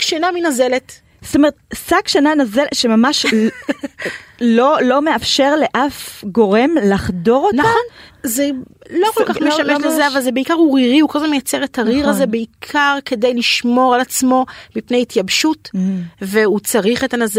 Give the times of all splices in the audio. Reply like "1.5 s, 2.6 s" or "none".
8.1 s